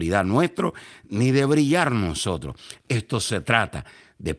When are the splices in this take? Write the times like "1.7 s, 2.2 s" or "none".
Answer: none